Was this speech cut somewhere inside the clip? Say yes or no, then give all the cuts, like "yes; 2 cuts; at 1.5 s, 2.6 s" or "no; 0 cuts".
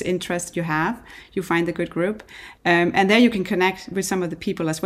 no; 0 cuts